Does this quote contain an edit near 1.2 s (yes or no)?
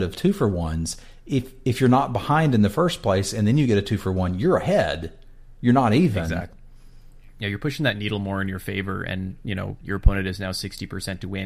no